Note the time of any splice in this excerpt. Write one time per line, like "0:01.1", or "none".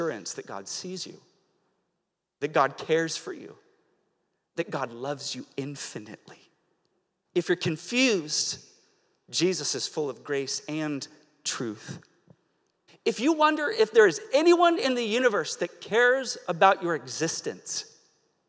0:07.2
0:12.9